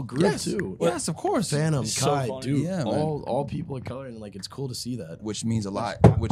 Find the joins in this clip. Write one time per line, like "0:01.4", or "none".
0:05.2